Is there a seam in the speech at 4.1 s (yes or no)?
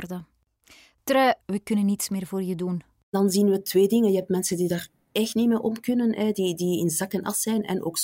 no